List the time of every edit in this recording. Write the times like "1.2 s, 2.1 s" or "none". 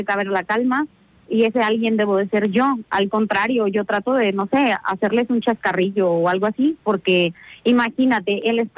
none